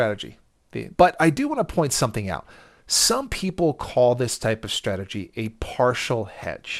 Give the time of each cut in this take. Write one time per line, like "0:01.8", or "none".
0:01.0